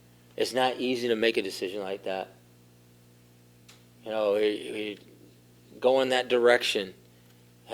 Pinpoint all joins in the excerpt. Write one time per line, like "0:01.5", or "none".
none